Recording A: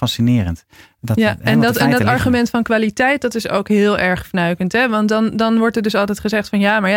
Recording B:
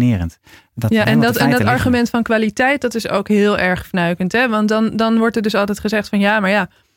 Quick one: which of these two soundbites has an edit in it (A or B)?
B